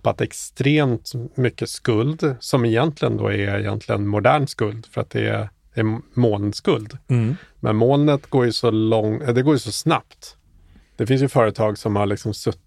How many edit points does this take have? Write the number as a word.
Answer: zero